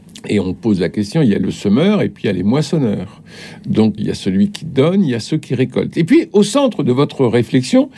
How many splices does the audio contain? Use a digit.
1